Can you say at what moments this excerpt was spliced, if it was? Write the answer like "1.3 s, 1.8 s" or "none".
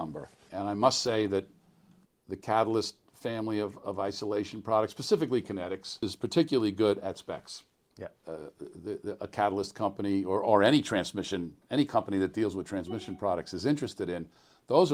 8.2 s